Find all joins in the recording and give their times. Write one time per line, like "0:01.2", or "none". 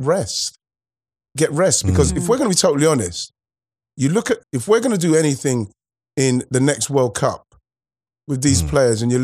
0:04.4

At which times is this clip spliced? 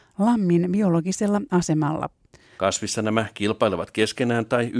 0:02.6

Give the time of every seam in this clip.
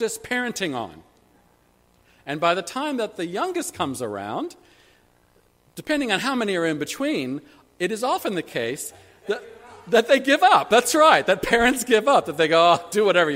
none

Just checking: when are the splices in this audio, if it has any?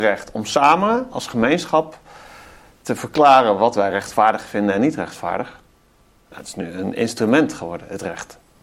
none

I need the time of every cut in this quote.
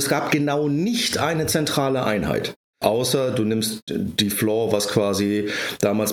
0:02.8

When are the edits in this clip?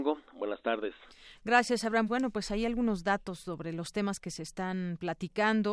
0:02.1

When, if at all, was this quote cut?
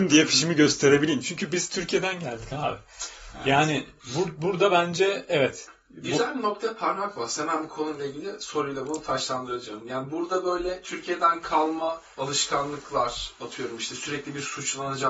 none

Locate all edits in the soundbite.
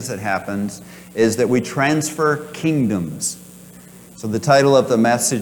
none

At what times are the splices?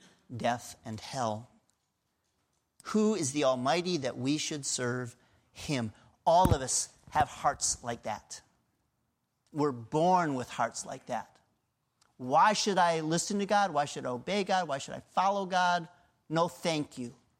0:02.8

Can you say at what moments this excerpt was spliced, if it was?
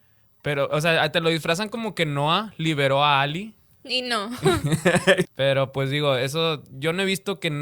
0:05.2

